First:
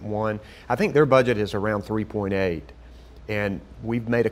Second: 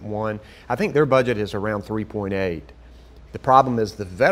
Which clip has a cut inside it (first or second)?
second